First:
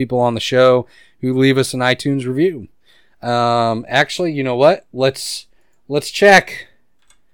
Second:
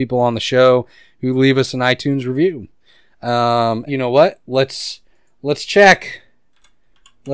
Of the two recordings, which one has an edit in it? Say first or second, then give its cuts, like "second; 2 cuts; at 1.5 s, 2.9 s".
second; 1 cut; at 3.9 s